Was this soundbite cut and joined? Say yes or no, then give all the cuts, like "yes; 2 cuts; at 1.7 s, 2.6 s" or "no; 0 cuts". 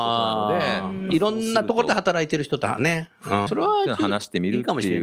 yes; 1 cut; at 3.5 s